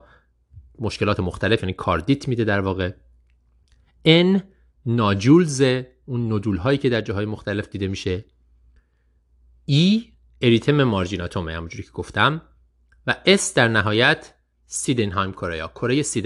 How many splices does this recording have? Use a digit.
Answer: 0